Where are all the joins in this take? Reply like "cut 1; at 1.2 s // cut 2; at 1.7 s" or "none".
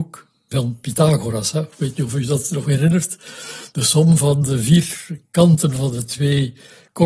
none